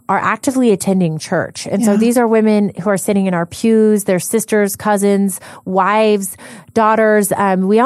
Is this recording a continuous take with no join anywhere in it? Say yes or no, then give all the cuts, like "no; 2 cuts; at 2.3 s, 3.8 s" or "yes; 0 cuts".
yes; 0 cuts